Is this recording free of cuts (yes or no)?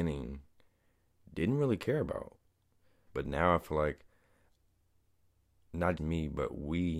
no